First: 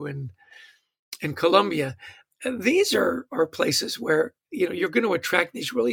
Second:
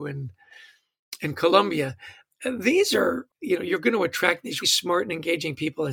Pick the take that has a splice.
second; 2 cuts; at 3.3 s, 4.6 s

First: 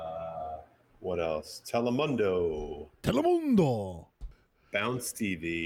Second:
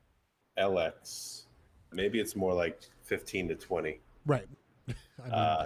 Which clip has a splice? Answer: second; 2 cuts; at 1.9 s, 4.5 s

